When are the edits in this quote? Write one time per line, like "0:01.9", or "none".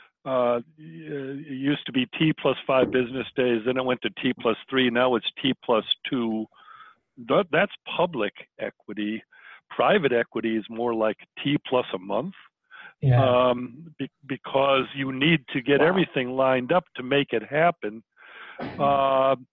none